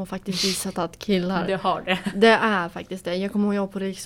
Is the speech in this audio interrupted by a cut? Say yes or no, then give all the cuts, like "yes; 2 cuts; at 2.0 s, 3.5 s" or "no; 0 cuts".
no; 0 cuts